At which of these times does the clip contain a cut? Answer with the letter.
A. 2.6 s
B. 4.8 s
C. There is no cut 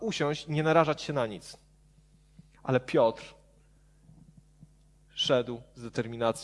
C